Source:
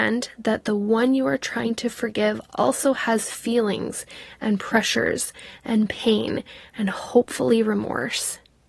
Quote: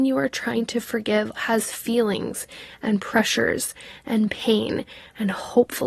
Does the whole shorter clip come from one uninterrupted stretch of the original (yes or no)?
no